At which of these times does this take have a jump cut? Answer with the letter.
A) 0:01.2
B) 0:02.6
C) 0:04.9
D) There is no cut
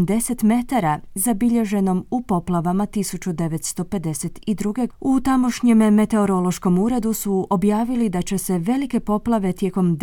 C